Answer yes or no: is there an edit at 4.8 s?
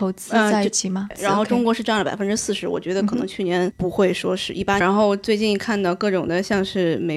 yes